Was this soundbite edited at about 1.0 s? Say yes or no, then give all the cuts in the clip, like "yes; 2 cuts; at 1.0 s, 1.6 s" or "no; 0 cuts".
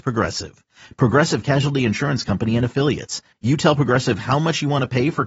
no; 1 cut; at 3.3 s